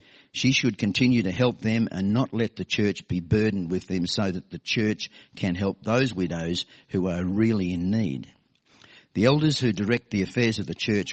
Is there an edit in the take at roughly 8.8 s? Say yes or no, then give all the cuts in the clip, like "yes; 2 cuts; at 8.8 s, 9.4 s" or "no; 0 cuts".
no; 0 cuts